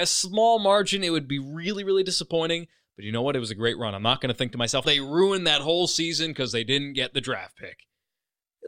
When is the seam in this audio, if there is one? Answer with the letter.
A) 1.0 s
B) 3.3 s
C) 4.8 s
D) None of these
C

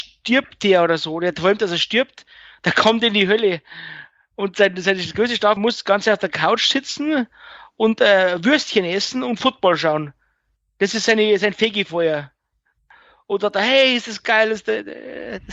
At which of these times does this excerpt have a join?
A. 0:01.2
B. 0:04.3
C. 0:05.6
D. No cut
C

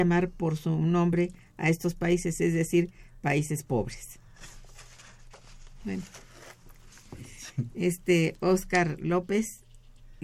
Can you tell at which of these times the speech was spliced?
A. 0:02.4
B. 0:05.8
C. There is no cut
C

